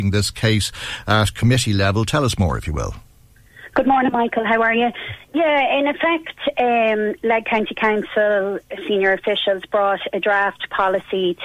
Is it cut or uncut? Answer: uncut